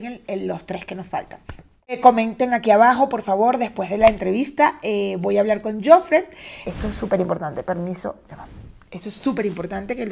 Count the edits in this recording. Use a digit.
1